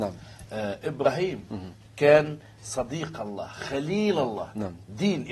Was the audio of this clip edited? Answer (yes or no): no